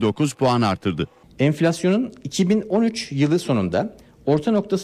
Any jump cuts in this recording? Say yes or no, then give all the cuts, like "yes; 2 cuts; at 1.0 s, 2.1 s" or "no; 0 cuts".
no; 0 cuts